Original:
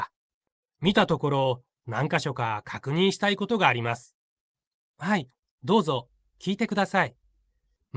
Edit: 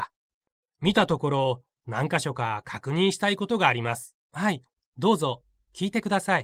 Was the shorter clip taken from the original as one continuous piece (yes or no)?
no